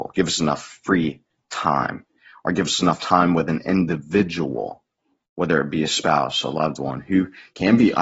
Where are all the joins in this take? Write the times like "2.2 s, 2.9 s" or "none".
none